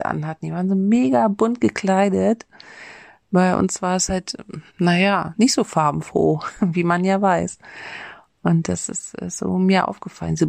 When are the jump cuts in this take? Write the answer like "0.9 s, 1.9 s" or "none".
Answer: 4.7 s